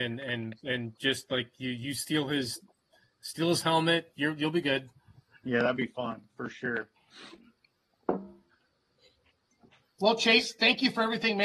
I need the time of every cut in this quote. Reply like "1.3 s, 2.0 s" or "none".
none